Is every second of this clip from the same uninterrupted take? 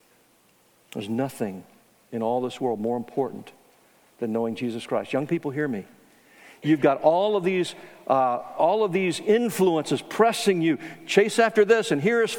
yes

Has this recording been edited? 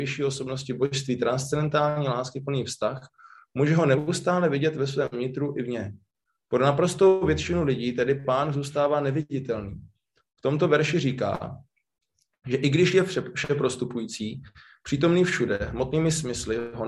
no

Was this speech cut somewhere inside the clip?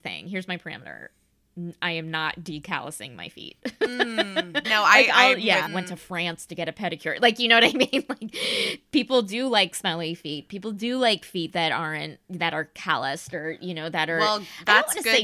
yes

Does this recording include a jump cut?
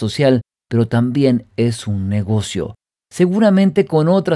yes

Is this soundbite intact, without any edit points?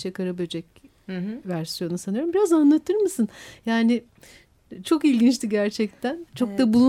no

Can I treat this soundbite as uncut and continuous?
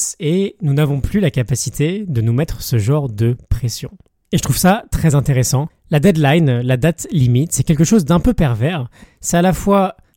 yes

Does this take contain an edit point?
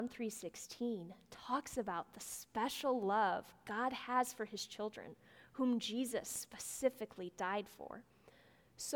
no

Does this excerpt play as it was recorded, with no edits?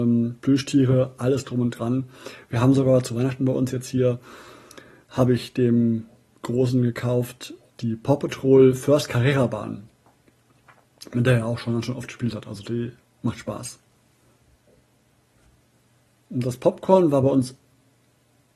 yes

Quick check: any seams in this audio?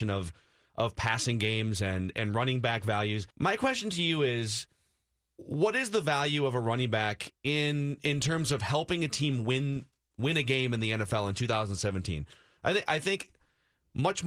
yes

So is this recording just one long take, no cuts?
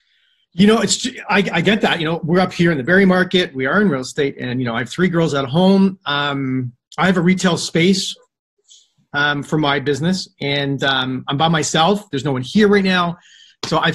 yes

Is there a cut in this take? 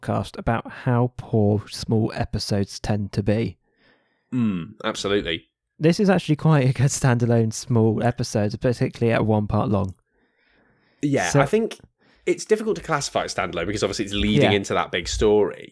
no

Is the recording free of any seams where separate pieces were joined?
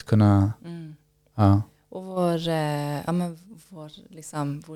yes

